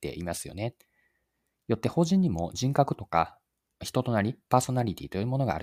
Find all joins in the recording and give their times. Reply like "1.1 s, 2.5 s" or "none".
none

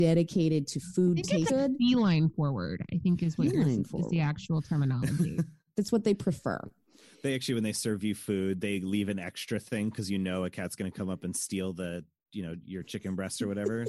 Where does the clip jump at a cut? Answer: 1.5 s

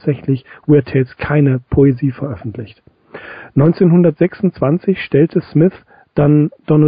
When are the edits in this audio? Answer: none

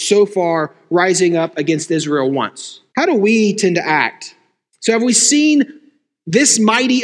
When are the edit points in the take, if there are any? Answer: 2.9 s, 4.7 s

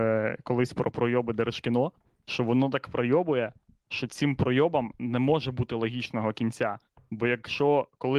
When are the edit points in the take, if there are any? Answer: none

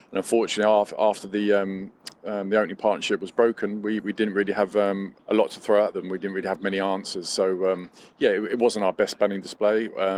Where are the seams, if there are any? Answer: 5.2 s

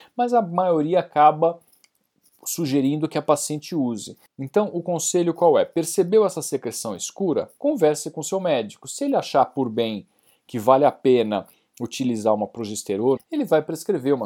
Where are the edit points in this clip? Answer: 13.2 s

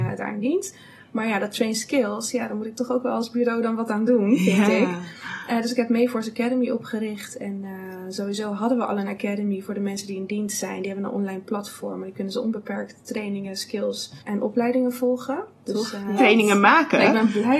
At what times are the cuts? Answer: 14.2 s, 16.2 s

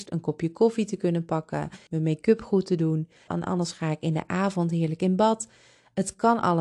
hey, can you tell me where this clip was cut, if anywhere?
1.9 s, 3.3 s

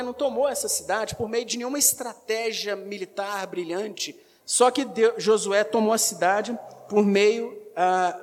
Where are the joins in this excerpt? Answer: 4.4 s

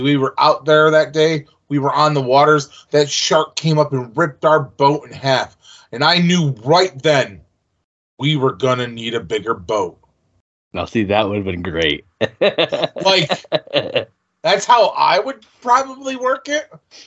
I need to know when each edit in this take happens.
none

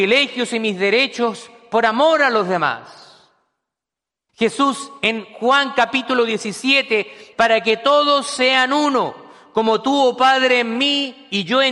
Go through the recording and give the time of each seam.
4.3 s, 7.3 s

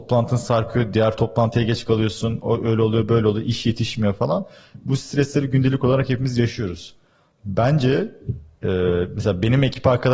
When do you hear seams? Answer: none

